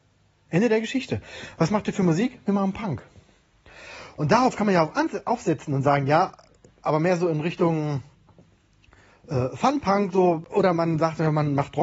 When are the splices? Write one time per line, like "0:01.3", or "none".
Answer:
none